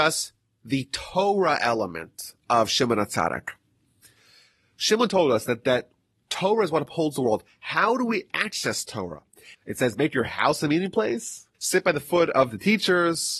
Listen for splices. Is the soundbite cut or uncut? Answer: cut